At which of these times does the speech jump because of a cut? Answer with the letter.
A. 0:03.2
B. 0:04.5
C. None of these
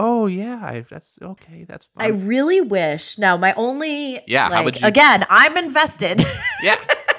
C